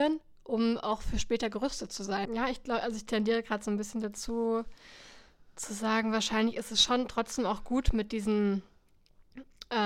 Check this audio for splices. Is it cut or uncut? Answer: cut